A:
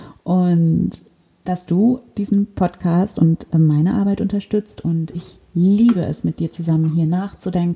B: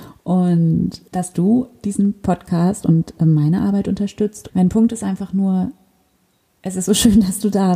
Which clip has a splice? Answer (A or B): B